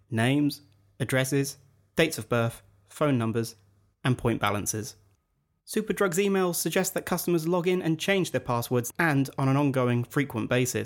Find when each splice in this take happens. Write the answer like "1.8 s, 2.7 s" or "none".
8.9 s